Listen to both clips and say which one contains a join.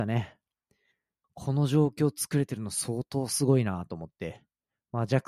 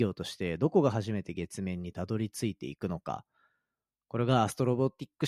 first; 1 cut; at 1.2 s

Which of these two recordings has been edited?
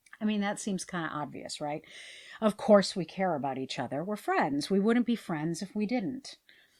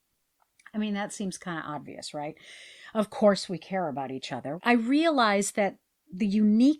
second; 1 cut; at 4.6 s

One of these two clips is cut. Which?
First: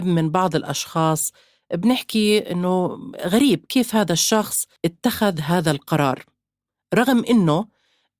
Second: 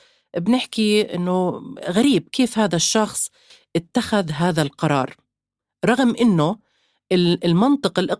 first; 1 cut; at 4.8 s

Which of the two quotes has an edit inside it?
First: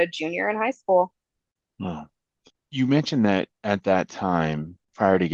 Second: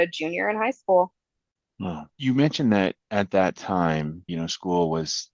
second; 2 cuts; at 2.1 s, 4.3 s

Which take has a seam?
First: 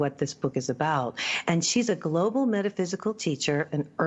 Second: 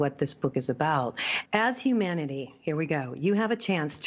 second; 1 cut; at 1.5 s

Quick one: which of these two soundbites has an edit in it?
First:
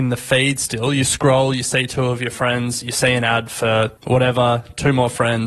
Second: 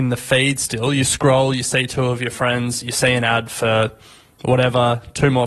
first; 1 cut; at 4.0 s

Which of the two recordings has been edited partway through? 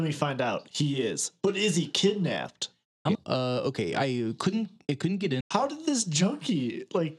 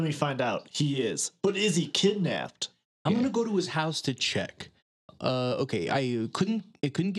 first; 2 cuts; at 3.1 s, 5.4 s

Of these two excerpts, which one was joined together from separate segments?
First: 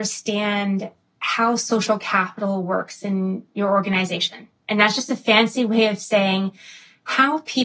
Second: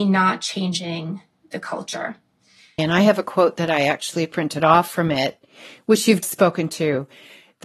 second; 2 cuts; at 2.8 s, 6.2 s

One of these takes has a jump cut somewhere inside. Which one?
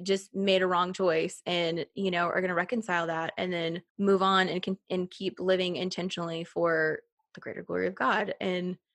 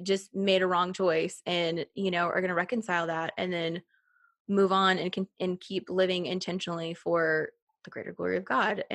first; 1 cut; at 3.9 s

